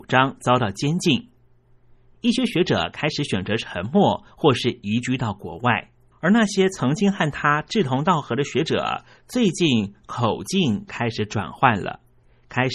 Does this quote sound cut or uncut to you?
uncut